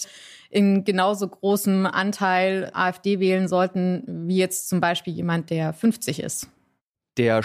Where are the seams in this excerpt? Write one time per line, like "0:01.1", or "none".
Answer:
none